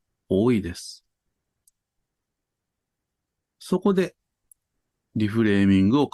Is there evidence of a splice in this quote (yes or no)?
no